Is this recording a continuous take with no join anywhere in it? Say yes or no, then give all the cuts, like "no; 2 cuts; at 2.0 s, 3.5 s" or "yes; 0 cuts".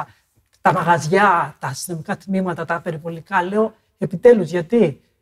yes; 0 cuts